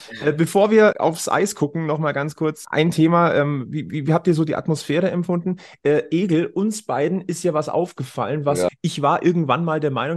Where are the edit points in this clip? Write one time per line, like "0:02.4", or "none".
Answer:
0:00.9
0:02.6
0:08.7